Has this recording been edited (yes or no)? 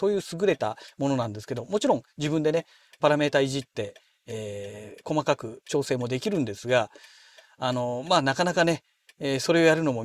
no